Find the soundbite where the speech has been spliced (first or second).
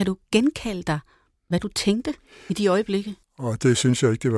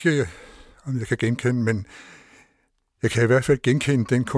first